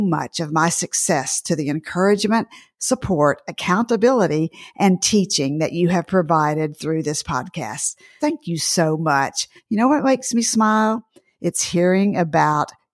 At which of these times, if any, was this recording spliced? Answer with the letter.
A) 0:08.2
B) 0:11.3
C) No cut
A